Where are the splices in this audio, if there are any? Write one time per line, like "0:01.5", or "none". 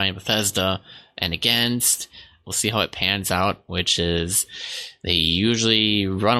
0:02.4
0:03.6